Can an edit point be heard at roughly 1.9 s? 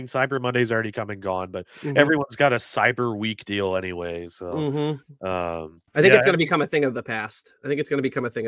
no; 1 cut; at 5.9 s

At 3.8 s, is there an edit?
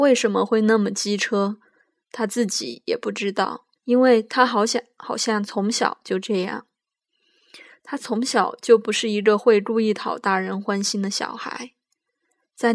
yes; 1 cut; at 3.8 s

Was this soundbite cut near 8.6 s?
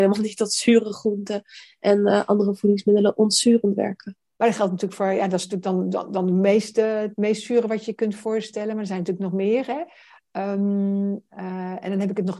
no; 1 cut; at 4.3 s

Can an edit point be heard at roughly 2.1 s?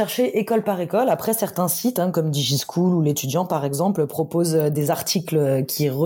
yes; 1 cut; at 2.1 s

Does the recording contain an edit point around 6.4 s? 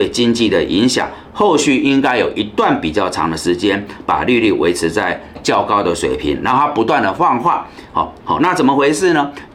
no; 1 cut; at 8.2 s

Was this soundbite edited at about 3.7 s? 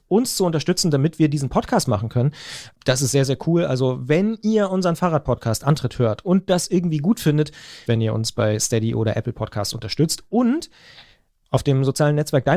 no; 1 cut; at 7.9 s

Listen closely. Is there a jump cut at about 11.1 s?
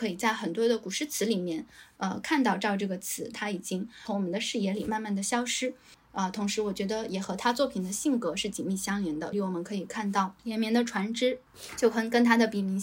no; 3 cuts; at 3.3 s, 5.9 s, 9.3 s

